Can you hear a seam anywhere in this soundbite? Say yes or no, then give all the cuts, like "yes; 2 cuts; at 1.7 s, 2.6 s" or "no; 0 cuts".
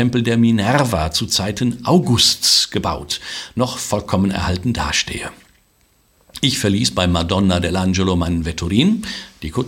no; 0 cuts